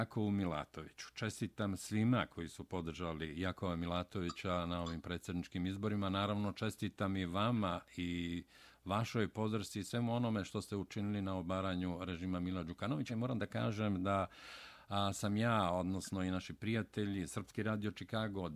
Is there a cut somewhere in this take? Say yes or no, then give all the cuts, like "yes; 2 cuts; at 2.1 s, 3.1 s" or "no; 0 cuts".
no; 0 cuts